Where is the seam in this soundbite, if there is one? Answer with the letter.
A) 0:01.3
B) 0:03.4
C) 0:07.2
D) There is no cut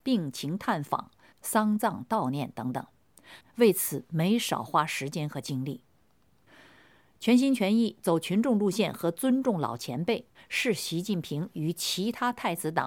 B